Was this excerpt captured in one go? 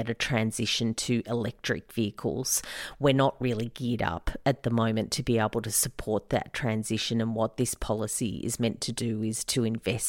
yes; 0 cuts

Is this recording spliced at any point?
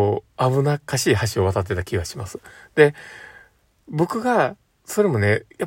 no; 0 cuts

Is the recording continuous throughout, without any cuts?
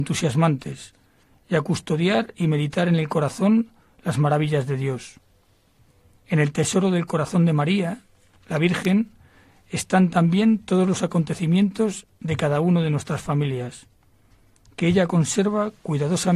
yes; 0 cuts

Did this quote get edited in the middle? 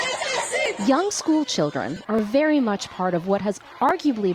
no; 0 cuts

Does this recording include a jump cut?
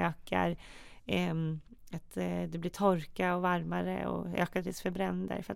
no; 0 cuts

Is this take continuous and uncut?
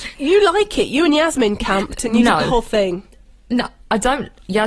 yes; 0 cuts

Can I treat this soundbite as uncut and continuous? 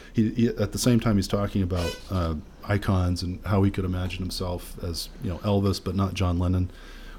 yes; 0 cuts

